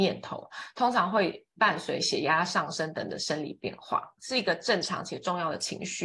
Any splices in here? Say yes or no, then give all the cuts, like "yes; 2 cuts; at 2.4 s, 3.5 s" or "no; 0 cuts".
yes; 1 cut; at 4.2 s